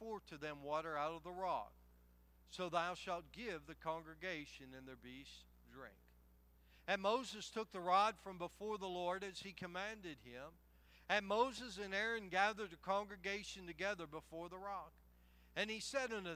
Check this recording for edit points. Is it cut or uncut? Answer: uncut